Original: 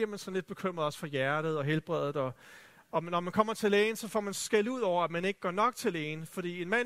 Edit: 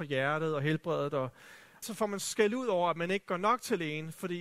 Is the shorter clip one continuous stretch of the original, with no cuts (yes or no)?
no